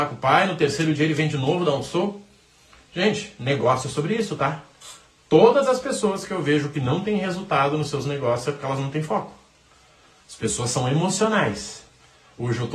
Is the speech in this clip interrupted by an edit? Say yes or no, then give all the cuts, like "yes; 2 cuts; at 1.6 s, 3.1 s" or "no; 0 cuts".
no; 0 cuts